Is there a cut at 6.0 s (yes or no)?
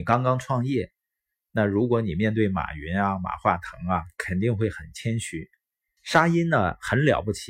yes